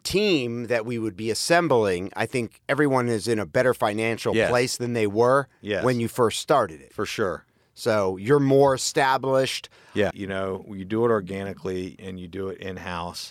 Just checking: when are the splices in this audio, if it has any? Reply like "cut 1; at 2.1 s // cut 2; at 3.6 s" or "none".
cut 1; at 10.1 s // cut 2; at 12.0 s